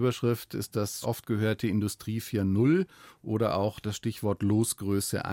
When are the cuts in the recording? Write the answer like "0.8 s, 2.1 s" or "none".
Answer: 1.0 s